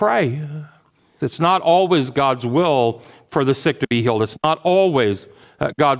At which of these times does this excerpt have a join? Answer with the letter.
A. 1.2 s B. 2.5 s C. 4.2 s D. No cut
A